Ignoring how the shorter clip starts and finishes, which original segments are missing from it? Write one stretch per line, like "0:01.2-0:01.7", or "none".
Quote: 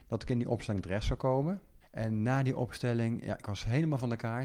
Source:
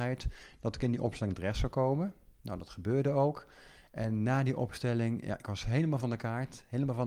0:02.3-0:03.8